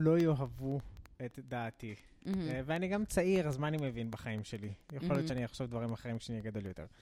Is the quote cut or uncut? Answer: uncut